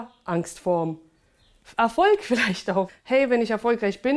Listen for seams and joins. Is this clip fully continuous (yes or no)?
no